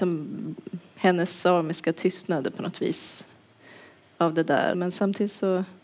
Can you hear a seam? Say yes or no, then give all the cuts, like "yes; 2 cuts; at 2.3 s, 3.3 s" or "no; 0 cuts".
yes; 1 cut; at 4.7 s